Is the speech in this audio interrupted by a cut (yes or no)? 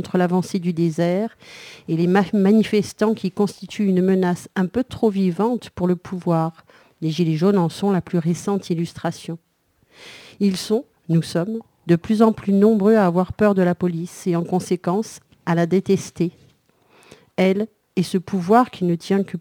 no